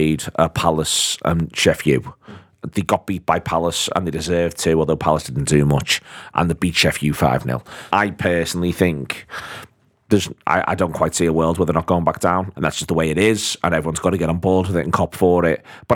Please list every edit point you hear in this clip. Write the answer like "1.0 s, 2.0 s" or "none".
7.9 s, 12.5 s